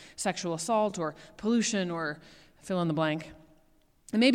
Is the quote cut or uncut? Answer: uncut